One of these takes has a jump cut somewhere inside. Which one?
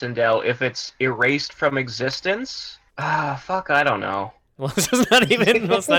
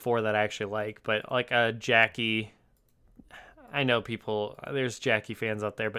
first; 2 cuts; at 2.9 s, 4.6 s

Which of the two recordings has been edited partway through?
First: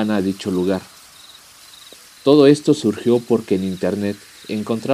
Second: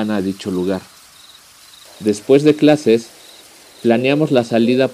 second; 1 cut; at 1.9 s

